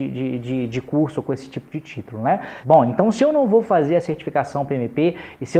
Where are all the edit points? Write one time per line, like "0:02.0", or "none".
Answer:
0:02.6